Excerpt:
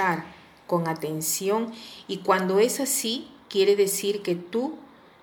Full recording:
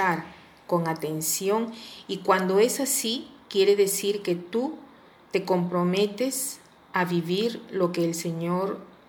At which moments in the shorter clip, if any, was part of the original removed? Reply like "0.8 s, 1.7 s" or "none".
none